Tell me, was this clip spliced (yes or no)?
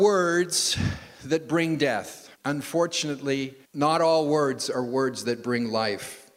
yes